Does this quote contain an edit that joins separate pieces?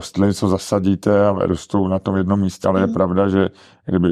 yes; 1 cut; at 2.6 s

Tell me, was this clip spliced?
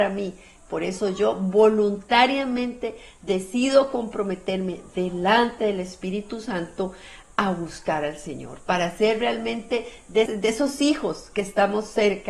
yes; 1 cut; at 10.3 s

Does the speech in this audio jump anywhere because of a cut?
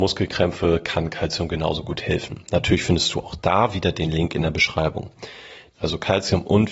yes; 1 cut; at 5.8 s

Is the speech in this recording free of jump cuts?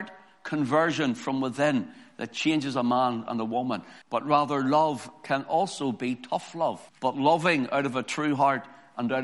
no; 2 cuts; at 4.0 s, 6.9 s

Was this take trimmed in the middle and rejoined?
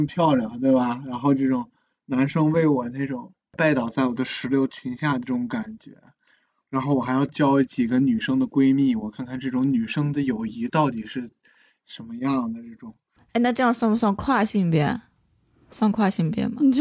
no; 0 cuts

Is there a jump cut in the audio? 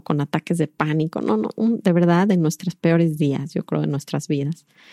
no; 0 cuts

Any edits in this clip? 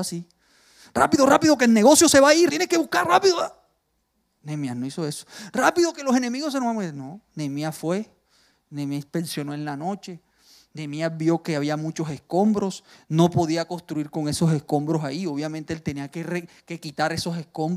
yes; 1 cut; at 2.5 s

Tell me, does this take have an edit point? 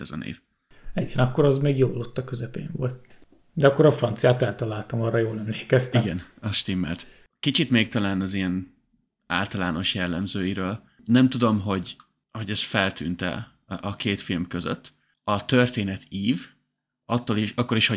no; 0 cuts

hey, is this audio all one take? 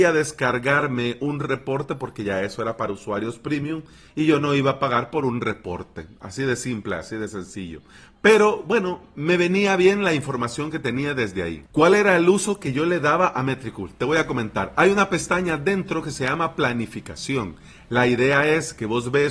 yes; 0 cuts

